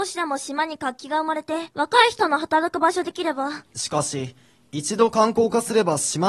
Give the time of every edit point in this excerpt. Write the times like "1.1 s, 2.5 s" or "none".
1.7 s, 3.7 s

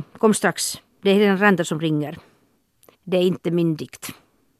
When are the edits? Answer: 2.9 s

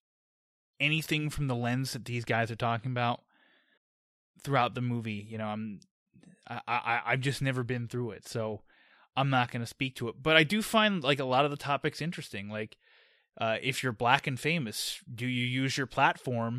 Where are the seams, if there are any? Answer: none

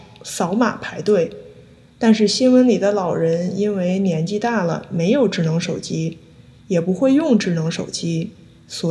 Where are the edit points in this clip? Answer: none

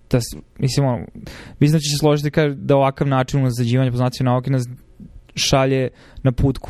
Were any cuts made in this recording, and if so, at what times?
none

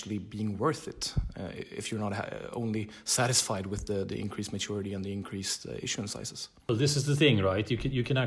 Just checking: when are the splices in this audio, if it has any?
none

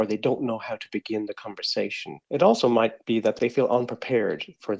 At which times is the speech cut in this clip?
none

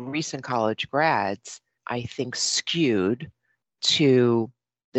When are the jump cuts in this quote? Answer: 1.8 s

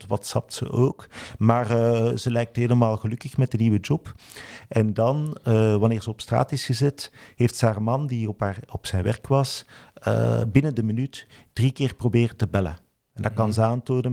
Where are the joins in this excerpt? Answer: none

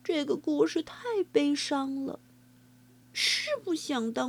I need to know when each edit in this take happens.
3.0 s

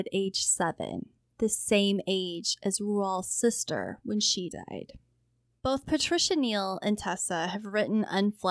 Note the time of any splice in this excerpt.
5.5 s

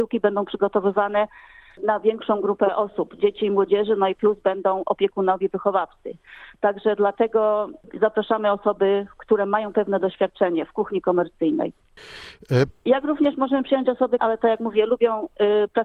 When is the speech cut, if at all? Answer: 12.7 s, 14.2 s

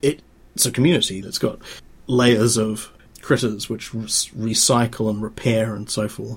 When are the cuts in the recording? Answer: 1.2 s

